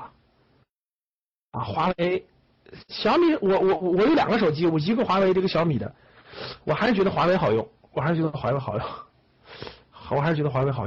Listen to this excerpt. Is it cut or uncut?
uncut